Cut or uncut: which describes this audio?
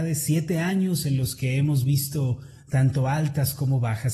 uncut